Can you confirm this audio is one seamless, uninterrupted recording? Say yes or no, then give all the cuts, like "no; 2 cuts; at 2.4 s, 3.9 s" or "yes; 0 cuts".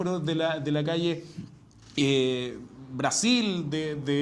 yes; 0 cuts